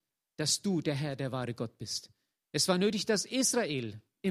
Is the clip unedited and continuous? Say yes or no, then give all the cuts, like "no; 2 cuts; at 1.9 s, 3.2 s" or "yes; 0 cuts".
yes; 0 cuts